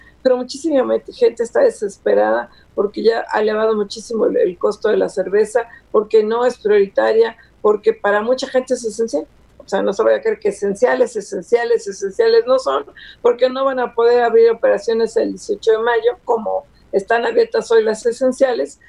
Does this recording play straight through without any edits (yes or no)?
no